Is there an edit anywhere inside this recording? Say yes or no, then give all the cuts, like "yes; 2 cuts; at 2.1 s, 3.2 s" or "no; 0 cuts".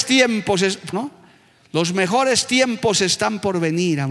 yes; 1 cut; at 0.9 s